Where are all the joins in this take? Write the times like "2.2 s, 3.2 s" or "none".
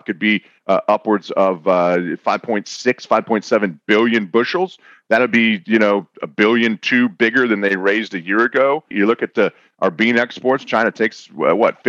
8.9 s